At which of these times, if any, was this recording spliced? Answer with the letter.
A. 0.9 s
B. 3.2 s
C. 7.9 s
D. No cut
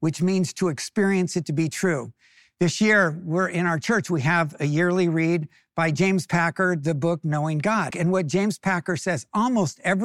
C